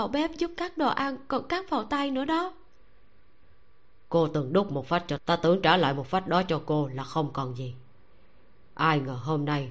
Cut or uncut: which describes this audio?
cut